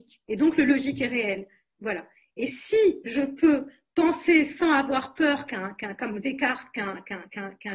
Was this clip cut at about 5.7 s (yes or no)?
no